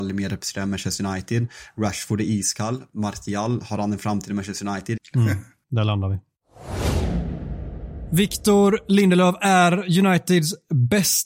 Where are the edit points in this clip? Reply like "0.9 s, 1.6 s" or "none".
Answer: 5.0 s

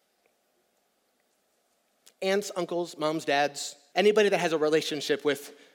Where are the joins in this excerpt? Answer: 2.1 s, 3.9 s

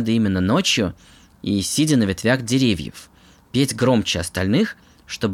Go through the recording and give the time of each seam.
none

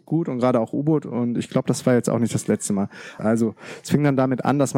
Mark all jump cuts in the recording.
3.2 s

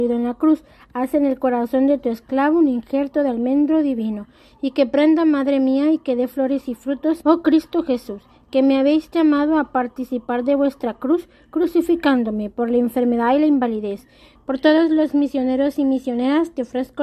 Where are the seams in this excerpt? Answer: 7.2 s, 14.4 s

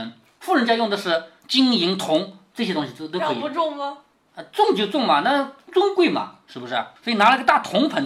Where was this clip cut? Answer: 7.0 s

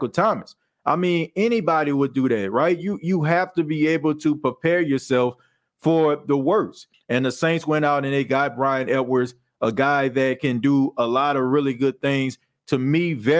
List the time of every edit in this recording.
6.9 s

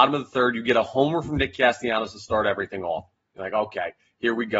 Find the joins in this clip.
none

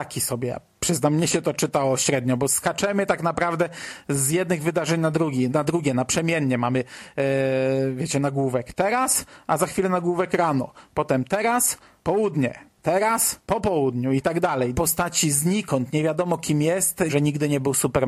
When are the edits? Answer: 5.5 s, 14.7 s, 17.1 s

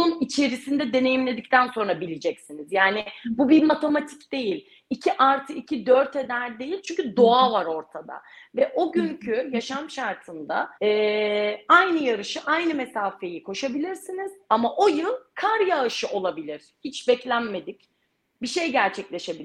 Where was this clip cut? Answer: 10.8 s

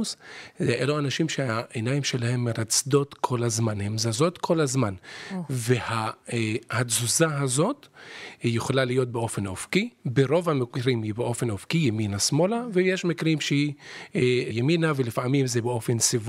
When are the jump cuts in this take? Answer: 10.0 s, 14.5 s

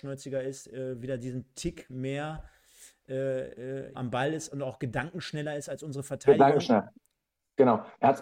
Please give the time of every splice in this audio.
3.9 s

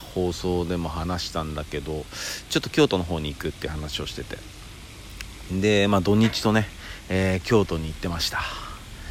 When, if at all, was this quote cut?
none

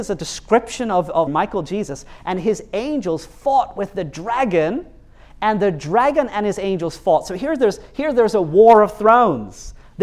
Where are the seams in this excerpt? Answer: 1.3 s

